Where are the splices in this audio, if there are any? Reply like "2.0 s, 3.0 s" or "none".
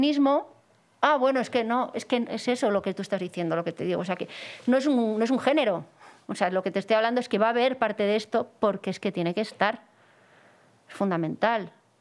none

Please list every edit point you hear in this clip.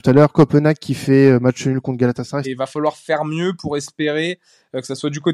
2.4 s

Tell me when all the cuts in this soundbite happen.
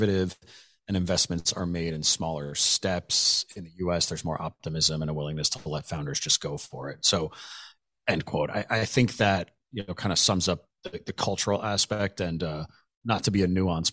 none

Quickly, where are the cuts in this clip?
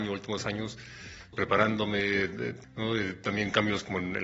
1.3 s, 2.6 s

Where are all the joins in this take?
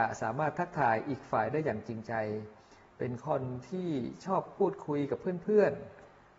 none

